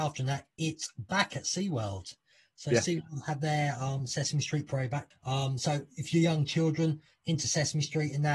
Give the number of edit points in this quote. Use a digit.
1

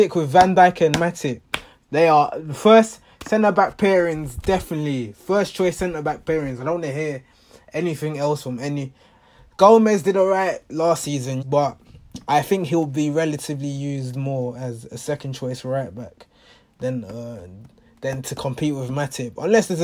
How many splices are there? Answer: 1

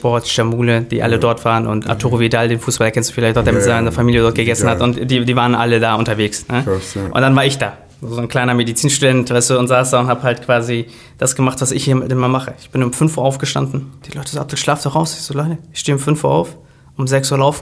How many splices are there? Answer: 0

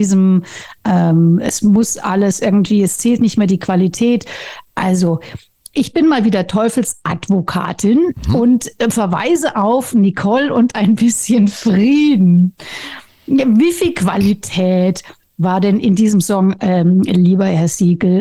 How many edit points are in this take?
0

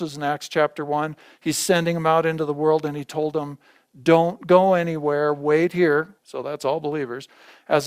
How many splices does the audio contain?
1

